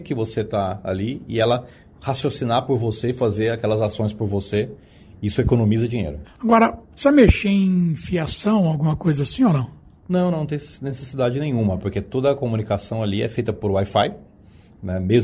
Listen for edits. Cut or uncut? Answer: cut